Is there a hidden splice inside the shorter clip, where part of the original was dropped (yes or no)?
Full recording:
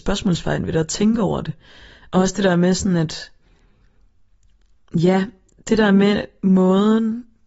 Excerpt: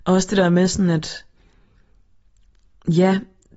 no